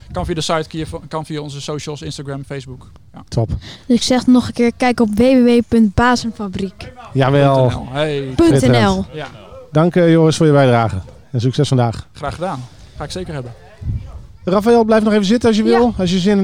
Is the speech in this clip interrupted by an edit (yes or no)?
no